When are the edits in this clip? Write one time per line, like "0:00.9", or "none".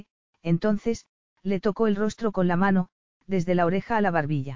0:03.1

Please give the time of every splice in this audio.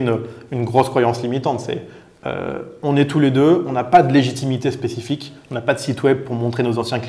none

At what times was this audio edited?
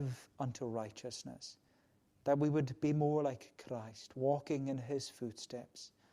none

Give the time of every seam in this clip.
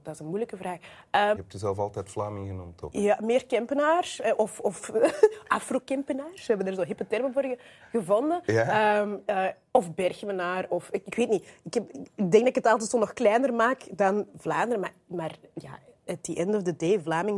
0:01.4

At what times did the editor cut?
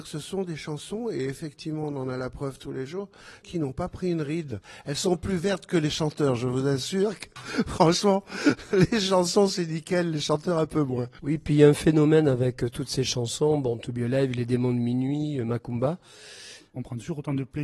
0:16.6

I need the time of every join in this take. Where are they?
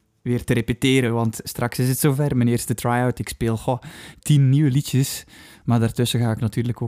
none

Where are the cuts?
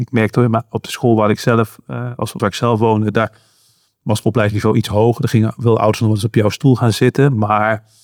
0:02.4

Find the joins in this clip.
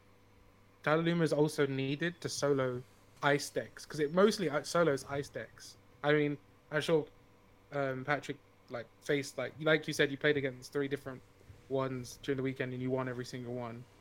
none

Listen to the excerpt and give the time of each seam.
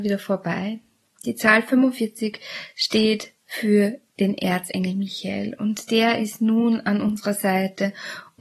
0:01.2

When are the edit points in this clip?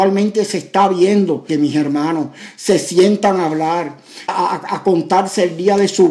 0:01.5
0:04.3

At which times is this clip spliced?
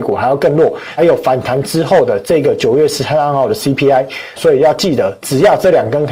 0:01.0
0:04.4

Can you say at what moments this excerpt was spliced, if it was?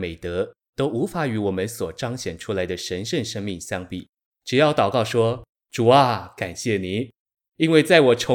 0:04.3

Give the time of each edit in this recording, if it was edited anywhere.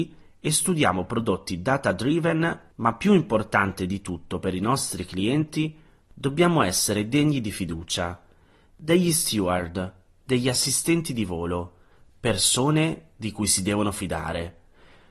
none

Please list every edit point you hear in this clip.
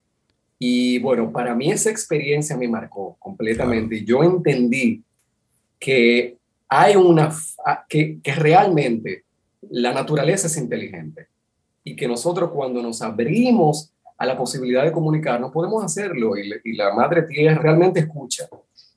0:17.6

